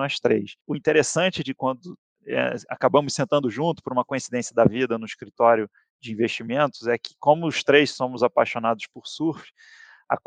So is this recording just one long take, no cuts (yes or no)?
yes